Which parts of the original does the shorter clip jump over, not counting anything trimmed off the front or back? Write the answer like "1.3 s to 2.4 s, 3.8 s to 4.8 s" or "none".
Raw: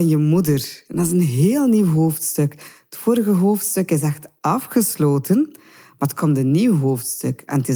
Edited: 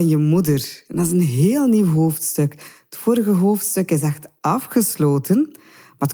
none